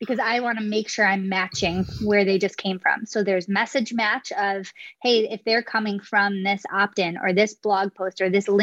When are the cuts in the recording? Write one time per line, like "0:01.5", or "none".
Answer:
none